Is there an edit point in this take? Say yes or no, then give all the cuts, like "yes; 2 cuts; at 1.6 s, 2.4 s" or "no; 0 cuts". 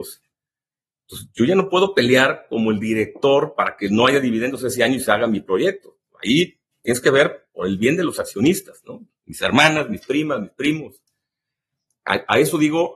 no; 0 cuts